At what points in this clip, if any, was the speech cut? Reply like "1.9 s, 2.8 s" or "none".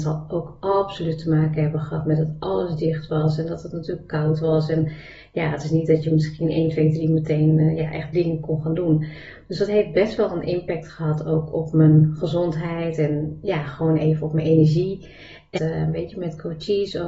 15.6 s